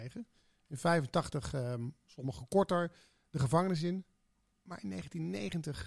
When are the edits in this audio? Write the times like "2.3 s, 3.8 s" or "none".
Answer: 2.0 s